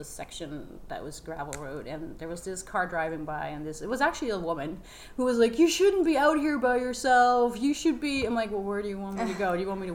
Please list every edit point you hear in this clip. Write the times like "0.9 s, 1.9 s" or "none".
none